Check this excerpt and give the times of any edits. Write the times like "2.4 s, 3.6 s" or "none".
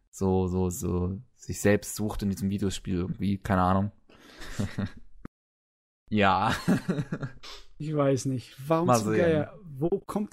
4.4 s